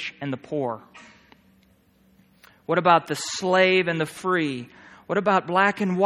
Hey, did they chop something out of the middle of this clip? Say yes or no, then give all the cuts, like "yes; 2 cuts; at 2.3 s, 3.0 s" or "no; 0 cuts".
no; 0 cuts